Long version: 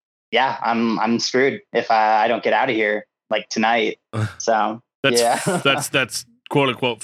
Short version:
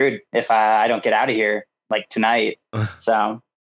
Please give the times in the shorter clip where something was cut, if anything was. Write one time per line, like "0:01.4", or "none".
none